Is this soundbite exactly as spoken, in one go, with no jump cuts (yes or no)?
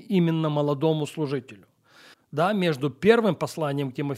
no